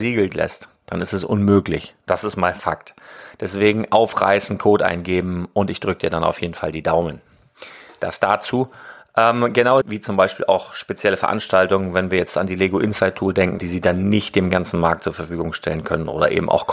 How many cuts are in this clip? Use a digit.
2